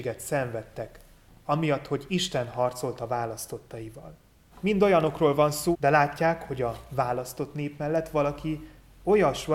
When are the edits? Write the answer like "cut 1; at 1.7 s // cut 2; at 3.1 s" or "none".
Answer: cut 1; at 4.5 s // cut 2; at 5.7 s